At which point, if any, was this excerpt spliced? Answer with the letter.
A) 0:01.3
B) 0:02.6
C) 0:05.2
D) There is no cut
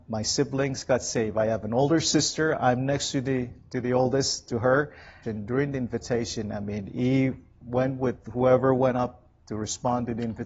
C